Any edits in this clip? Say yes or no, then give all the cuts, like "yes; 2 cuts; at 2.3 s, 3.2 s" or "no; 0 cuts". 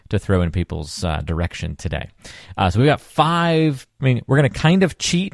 no; 0 cuts